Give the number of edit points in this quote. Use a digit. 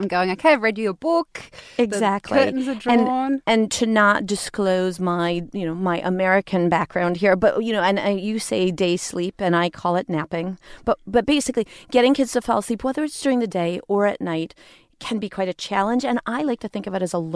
0